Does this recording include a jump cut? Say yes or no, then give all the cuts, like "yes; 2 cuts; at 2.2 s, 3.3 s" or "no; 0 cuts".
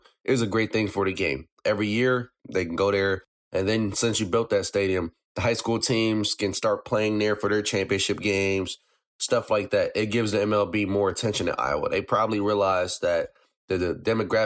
no; 0 cuts